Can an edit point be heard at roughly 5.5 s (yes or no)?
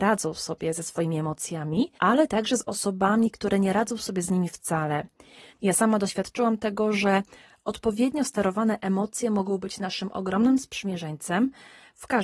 yes